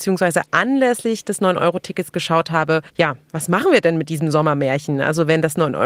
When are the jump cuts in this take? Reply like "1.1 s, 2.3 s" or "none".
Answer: 2.9 s

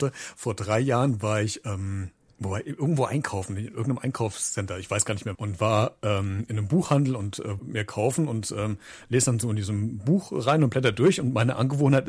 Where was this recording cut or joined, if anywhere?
5.3 s, 7.6 s

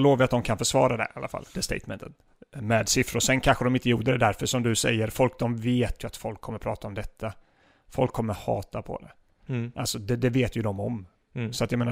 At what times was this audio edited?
none

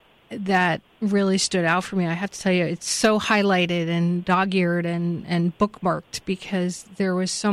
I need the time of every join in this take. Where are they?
none

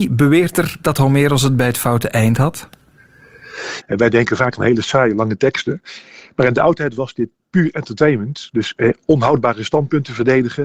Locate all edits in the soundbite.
3.8 s

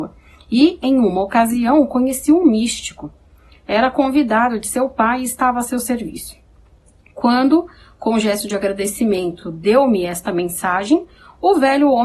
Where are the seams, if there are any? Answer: none

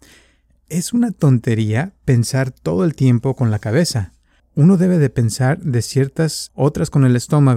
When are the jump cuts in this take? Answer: 4.4 s, 6.5 s

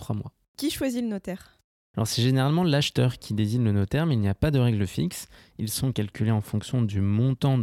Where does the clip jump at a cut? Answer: 5.4 s

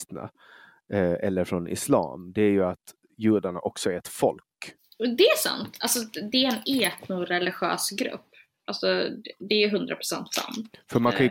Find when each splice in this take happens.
6.3 s

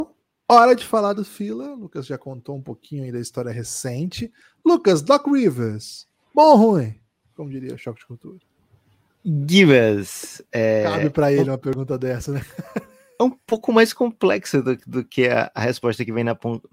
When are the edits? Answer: none

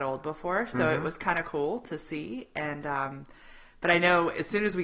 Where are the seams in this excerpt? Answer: none

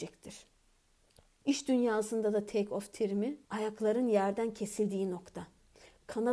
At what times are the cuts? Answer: 1.4 s, 3.4 s

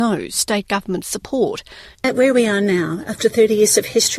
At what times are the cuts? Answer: 1.9 s

